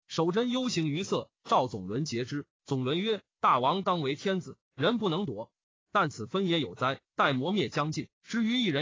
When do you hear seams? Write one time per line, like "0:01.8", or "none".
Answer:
none